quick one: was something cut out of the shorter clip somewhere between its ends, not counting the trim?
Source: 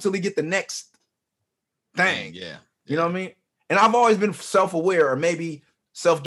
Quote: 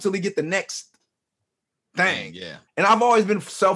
yes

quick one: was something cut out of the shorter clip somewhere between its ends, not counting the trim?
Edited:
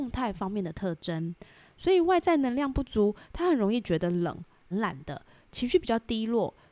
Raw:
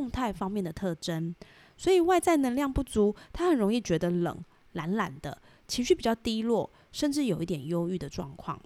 yes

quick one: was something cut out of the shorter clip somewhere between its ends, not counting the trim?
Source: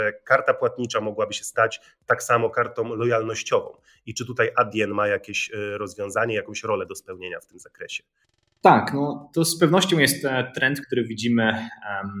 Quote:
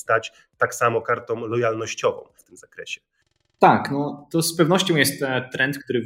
yes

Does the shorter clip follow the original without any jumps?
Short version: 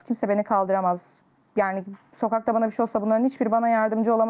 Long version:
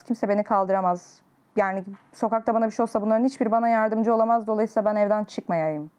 yes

